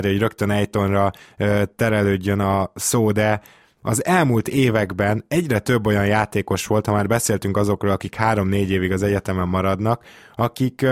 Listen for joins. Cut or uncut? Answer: uncut